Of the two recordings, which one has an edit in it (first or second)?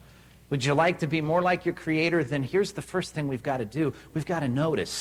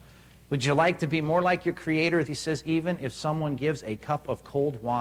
second